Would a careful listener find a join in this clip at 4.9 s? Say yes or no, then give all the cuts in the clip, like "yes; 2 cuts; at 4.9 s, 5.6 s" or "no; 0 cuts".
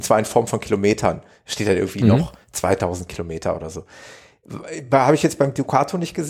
no; 0 cuts